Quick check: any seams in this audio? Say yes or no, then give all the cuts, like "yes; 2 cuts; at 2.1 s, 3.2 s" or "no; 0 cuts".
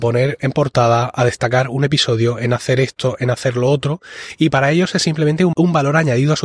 yes; 1 cut; at 5.5 s